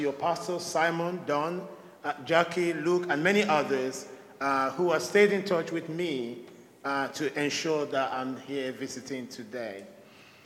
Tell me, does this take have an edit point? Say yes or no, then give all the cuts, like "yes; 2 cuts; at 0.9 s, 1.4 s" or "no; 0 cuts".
no; 0 cuts